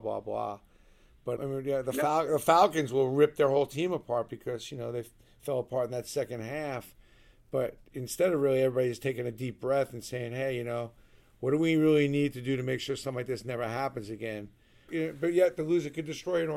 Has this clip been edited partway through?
yes; 2 cuts; at 1.4 s, 14.9 s

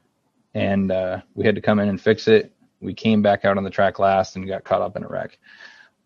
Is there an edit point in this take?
yes; 1 cut; at 2.7 s

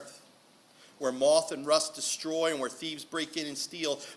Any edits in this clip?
no; 0 cuts

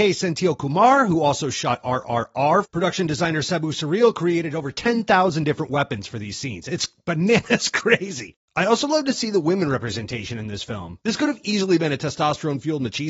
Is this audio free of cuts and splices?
no; 1 cut; at 2.6 s

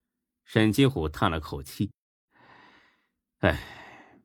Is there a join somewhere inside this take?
no; 0 cuts

